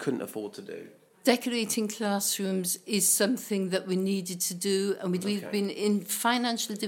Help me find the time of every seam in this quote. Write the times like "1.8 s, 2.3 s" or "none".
5.2 s